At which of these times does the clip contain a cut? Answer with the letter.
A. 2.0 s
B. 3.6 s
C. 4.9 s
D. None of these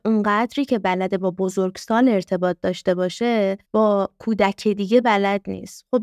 B